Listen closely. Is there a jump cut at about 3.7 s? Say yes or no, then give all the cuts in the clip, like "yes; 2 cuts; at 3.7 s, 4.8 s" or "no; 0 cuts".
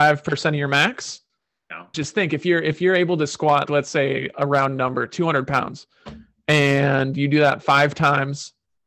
yes; 2 cuts; at 1.9 s, 3.7 s